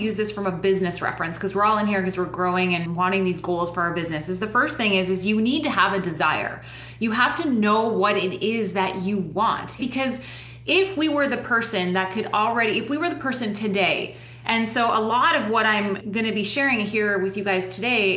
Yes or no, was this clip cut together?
yes